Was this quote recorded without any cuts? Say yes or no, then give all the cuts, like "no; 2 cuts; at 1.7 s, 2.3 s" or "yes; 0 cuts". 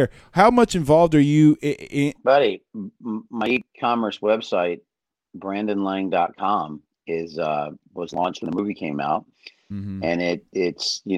no; 1 cut; at 2.1 s